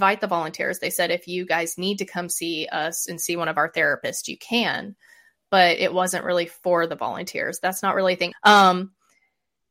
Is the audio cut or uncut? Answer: cut